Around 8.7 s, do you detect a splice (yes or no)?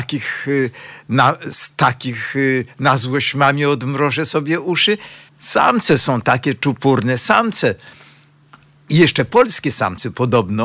no